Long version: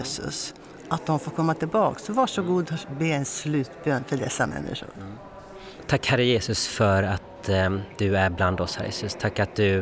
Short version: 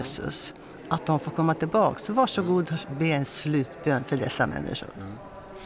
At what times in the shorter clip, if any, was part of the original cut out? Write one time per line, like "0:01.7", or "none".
none